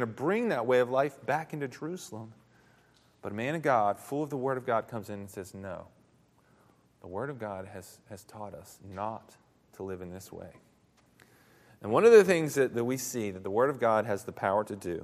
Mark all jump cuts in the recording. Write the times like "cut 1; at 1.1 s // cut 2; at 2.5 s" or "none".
none